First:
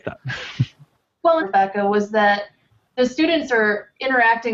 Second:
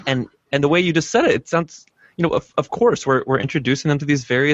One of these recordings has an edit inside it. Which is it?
first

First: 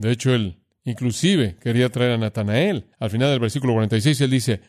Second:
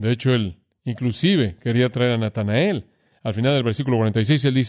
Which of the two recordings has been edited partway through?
first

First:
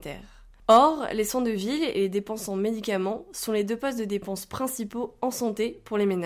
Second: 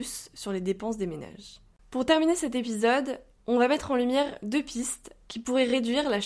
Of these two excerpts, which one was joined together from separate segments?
second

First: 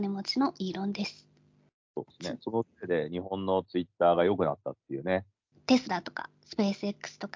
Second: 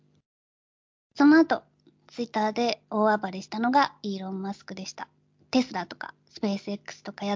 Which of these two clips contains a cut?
first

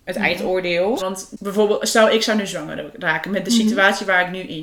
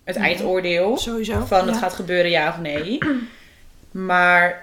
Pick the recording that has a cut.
first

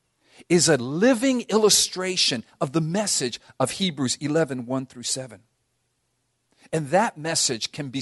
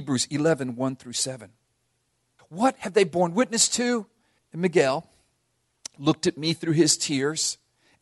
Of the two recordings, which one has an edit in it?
second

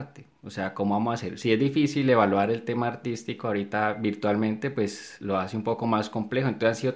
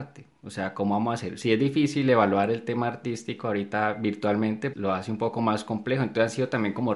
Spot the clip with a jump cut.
second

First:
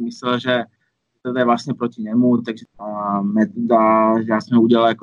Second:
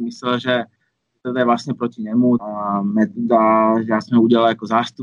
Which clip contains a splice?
second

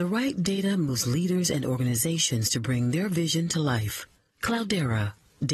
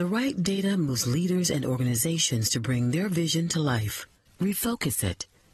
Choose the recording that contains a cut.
second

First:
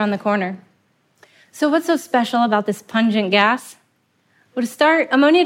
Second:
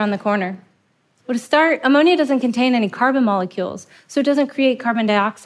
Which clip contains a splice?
second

